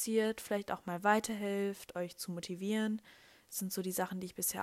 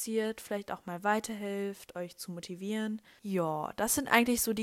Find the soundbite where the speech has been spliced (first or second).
second